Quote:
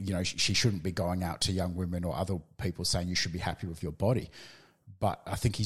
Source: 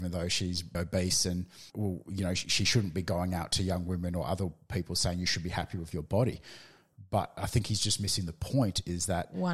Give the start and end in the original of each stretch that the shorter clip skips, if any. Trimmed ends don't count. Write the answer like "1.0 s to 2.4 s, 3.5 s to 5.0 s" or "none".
none